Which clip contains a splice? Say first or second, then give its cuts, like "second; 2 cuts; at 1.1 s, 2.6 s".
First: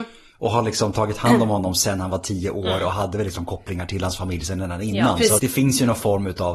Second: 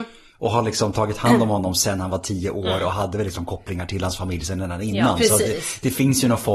first; 1 cut; at 5.4 s